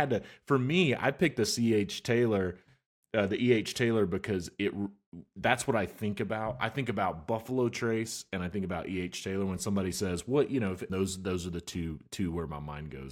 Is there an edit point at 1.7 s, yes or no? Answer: no